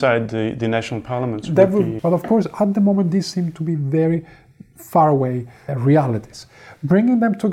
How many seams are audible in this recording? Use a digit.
2